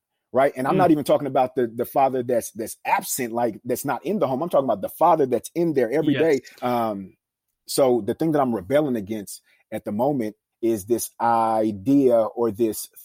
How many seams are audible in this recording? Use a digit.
2